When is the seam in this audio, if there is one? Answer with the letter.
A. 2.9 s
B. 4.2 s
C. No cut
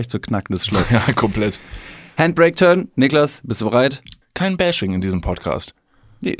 B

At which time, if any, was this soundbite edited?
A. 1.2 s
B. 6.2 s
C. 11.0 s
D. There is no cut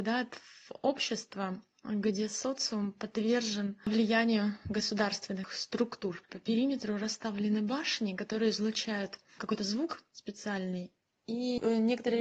B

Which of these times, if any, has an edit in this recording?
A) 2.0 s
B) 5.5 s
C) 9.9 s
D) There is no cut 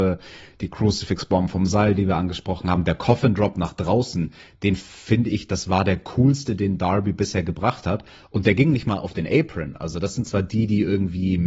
D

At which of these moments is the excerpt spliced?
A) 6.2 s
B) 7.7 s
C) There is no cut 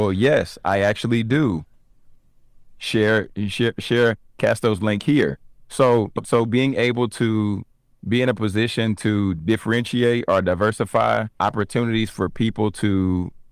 C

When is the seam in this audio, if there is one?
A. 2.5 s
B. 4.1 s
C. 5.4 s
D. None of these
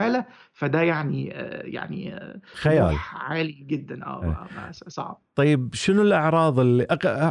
A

